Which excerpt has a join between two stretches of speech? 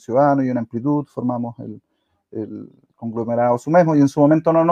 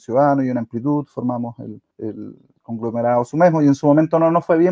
second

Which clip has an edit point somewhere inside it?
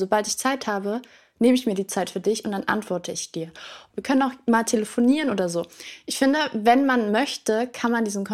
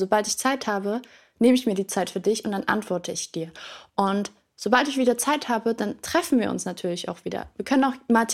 first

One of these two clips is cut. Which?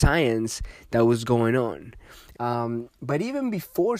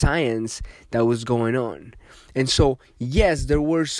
first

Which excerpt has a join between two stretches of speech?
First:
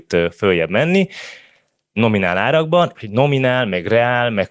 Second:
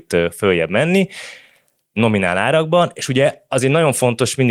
first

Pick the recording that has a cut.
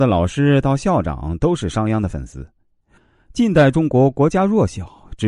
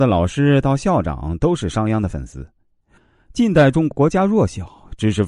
second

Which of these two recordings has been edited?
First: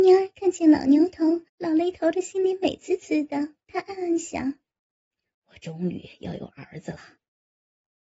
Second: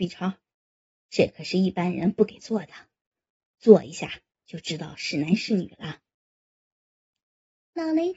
first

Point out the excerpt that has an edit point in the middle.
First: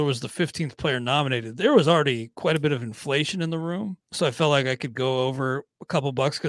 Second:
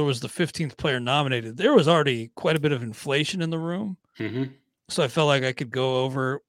first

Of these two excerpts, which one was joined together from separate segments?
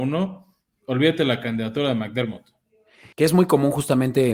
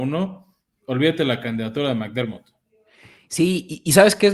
first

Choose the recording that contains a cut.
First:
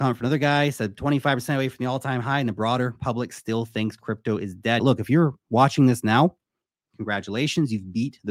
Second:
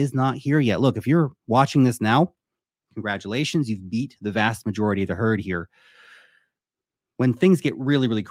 first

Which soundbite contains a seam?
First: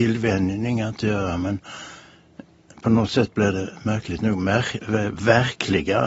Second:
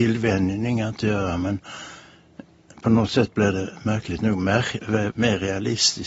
second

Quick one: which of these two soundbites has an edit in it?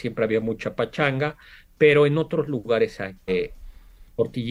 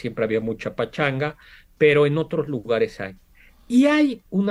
first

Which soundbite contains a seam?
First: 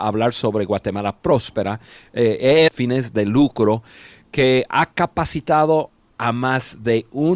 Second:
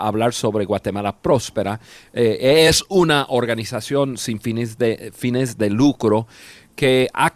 first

